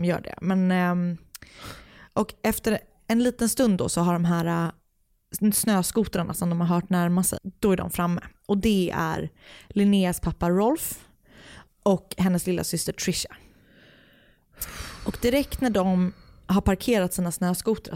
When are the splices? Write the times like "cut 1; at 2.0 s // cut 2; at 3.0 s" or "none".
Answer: cut 1; at 7.4 s